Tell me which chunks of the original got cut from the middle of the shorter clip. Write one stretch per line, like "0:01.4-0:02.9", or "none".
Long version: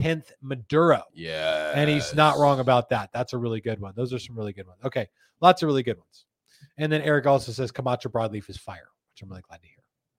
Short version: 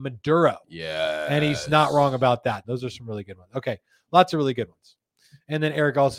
0:03.1-0:03.9